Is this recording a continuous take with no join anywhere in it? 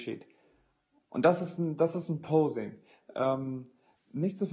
yes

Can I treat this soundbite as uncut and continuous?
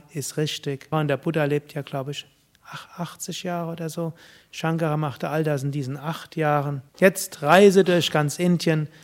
no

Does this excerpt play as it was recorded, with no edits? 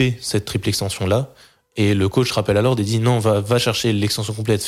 yes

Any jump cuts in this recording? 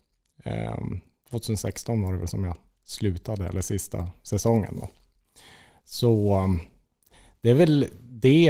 no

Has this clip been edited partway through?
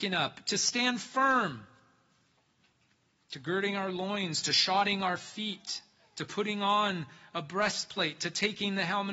no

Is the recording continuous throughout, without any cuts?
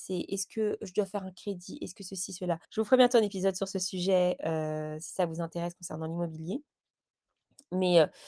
no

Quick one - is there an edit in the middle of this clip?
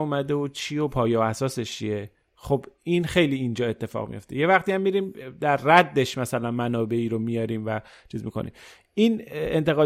no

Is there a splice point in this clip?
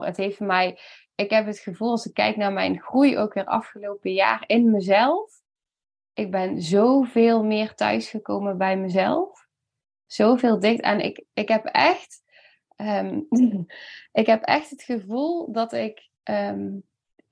yes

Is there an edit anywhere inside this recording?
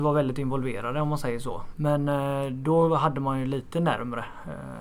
yes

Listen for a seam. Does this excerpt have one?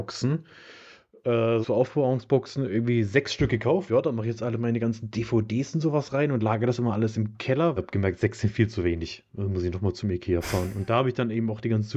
yes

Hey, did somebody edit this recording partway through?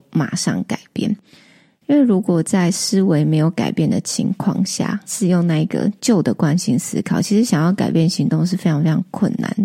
no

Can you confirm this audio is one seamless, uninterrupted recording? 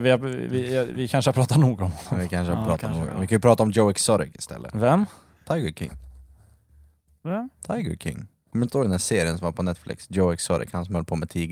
yes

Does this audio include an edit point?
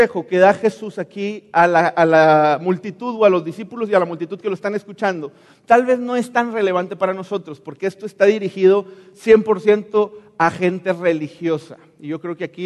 no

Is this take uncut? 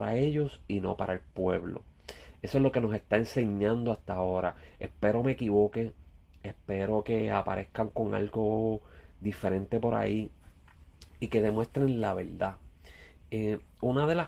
yes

